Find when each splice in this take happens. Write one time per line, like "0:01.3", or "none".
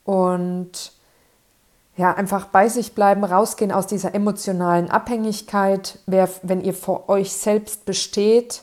none